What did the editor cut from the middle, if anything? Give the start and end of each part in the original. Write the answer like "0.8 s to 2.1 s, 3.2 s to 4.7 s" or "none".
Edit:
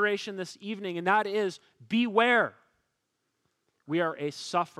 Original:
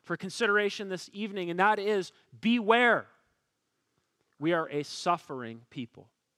none

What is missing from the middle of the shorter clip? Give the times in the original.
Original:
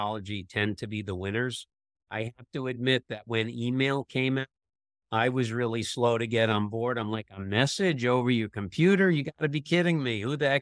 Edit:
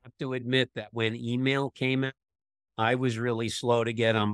none

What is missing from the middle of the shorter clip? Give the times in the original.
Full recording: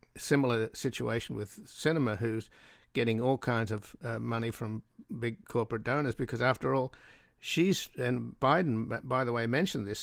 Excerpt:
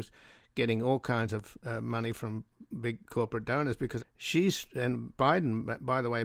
6.4 s to 7.2 s

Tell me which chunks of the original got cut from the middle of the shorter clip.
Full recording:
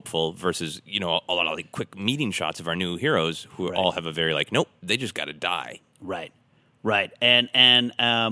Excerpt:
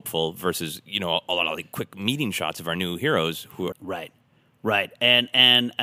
3.7 s to 5.9 s

